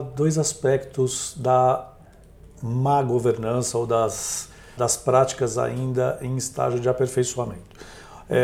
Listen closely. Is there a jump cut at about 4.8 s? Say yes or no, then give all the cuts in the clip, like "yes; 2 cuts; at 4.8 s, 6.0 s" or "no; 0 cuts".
yes; 1 cut; at 4.8 s